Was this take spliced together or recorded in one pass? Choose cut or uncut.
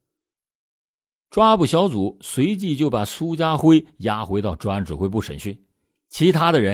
uncut